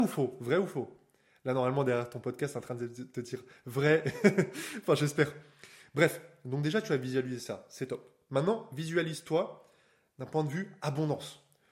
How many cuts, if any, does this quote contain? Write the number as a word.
zero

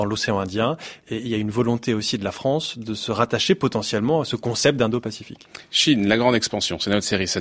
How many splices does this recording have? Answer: zero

